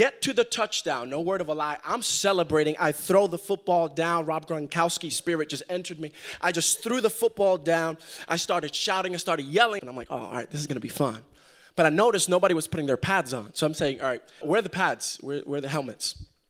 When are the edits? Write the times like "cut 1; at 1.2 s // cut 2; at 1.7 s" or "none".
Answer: cut 1; at 9.8 s // cut 2; at 14.4 s